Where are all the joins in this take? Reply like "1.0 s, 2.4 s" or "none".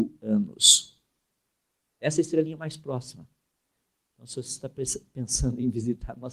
none

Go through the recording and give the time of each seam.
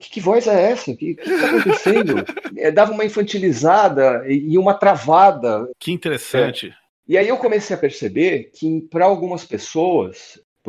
2.5 s, 5.7 s

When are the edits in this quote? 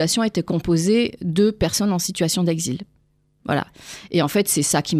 none

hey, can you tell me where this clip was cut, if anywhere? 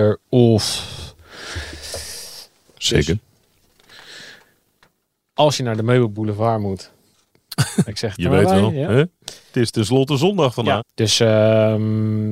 2.7 s, 7.9 s, 10.8 s

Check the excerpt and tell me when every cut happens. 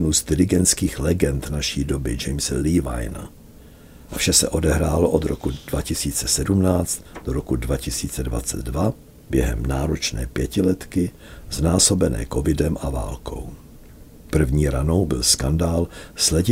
4.1 s

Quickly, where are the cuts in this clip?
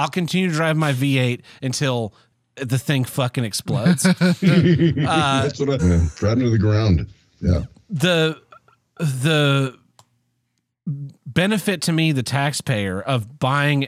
5.8 s

